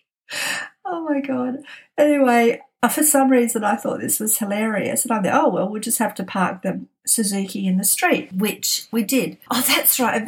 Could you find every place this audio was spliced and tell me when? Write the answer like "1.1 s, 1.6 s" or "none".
none

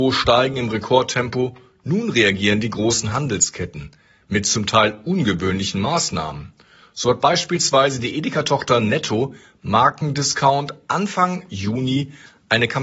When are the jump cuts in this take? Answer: none

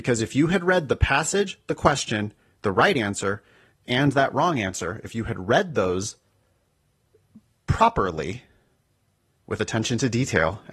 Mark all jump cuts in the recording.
none

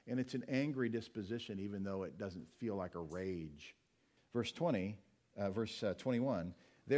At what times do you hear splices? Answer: 4.2 s

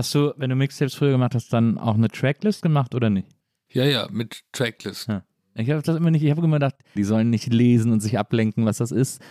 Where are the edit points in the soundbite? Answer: 7.0 s

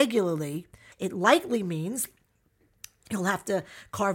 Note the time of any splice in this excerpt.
0.9 s

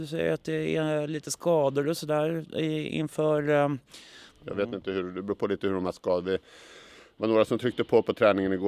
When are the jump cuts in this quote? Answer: 4.3 s

